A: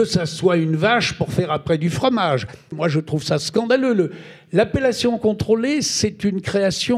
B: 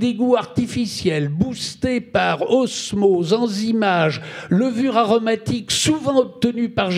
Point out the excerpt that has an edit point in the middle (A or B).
A